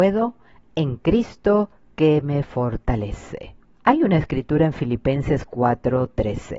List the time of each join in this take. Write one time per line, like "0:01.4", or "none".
0:03.7